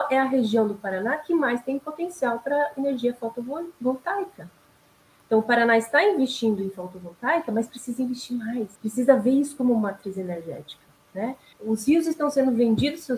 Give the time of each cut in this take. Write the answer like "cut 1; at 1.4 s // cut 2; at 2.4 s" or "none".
cut 1; at 8.8 s // cut 2; at 11.5 s

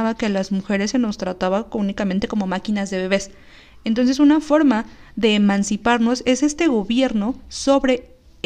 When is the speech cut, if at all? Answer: none

